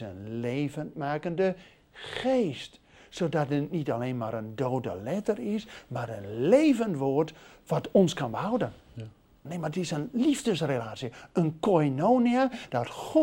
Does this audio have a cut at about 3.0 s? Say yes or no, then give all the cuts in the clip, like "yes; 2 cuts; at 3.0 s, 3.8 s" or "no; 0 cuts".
no; 1 cut; at 9.5 s